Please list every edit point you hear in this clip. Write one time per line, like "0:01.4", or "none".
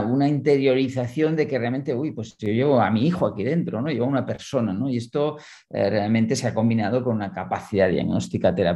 none